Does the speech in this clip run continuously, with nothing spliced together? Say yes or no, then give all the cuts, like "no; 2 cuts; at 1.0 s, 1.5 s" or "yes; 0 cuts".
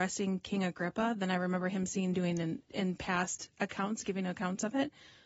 yes; 0 cuts